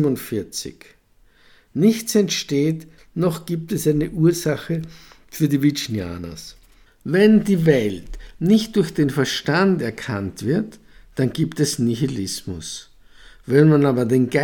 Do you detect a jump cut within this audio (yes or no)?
yes